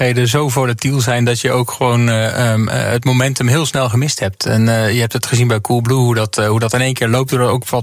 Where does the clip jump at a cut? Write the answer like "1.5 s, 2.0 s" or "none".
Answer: none